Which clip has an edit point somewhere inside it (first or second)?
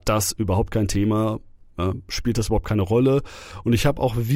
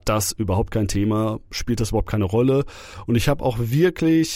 second